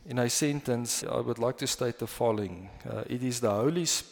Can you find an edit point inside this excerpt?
yes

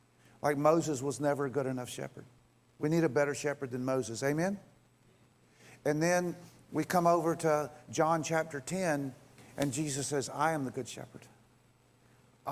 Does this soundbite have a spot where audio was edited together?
no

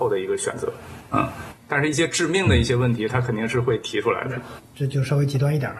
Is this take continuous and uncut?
no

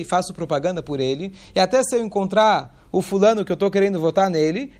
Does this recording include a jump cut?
no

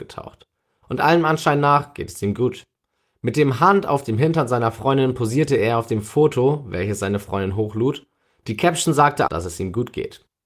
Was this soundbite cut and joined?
yes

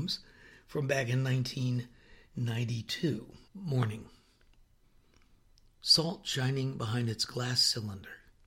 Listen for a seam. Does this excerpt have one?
yes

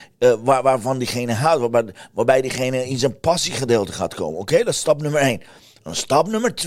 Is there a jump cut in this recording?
no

